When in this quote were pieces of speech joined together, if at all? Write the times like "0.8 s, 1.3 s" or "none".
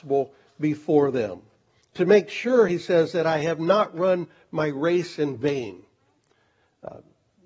none